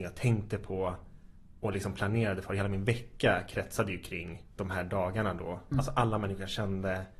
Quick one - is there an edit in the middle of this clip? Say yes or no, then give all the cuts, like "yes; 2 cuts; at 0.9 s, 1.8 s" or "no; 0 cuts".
yes; 2 cuts; at 1.6 s, 5.7 s